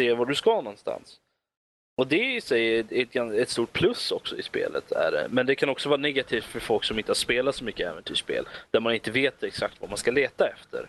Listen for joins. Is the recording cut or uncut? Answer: uncut